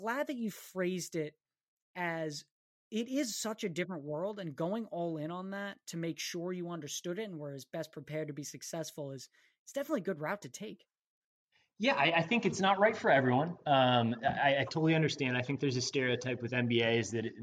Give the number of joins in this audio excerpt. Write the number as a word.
zero